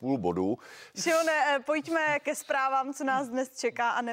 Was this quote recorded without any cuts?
no; 1 cut; at 0.9 s

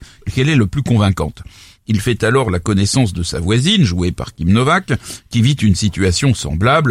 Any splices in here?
yes; 1 cut; at 1.8 s

